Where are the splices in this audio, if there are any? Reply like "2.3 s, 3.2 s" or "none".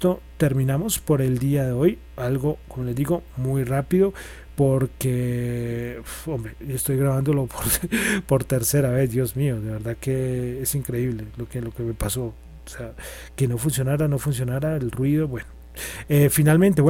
none